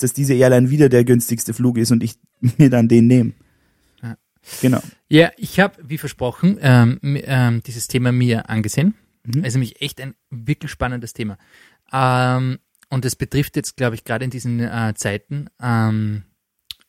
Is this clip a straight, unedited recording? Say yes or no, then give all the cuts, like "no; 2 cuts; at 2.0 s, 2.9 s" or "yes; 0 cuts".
yes; 0 cuts